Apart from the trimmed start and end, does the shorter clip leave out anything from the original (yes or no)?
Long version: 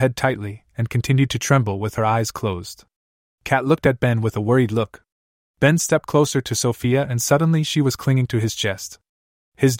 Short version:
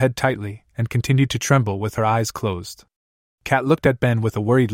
no